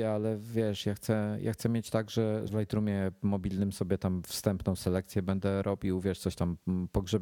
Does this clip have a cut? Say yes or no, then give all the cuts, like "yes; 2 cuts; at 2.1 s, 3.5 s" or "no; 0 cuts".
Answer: yes; 1 cut; at 2.5 s